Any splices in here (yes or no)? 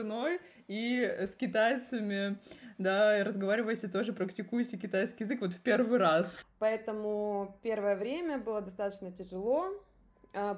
yes